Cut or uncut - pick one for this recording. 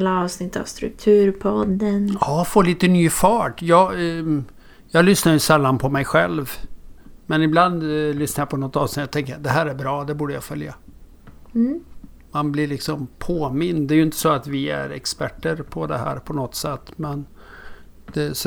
uncut